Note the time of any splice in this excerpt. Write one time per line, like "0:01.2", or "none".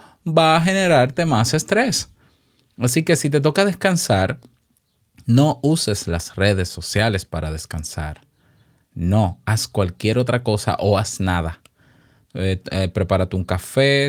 none